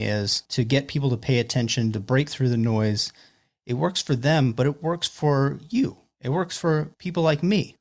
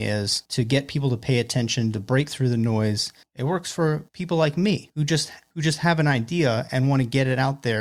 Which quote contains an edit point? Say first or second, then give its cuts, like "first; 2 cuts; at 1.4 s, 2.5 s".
second; 1 cut; at 3.2 s